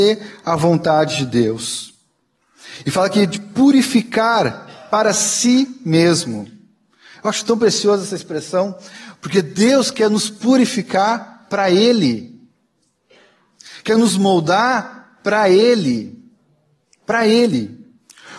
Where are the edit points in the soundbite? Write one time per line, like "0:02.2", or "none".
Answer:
none